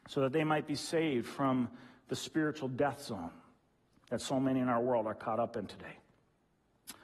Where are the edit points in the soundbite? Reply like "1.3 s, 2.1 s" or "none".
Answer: none